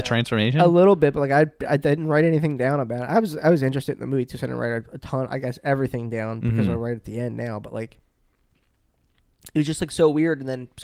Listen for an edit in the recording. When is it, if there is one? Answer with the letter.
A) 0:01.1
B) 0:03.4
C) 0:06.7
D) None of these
D